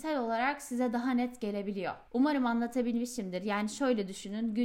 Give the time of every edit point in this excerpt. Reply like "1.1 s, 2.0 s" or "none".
2.1 s